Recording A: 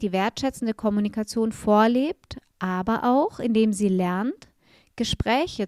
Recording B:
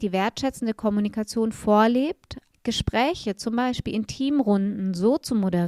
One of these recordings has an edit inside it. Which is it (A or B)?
B